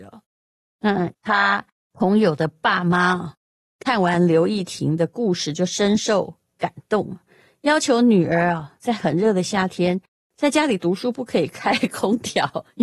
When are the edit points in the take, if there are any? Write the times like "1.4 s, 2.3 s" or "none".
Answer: 1.1 s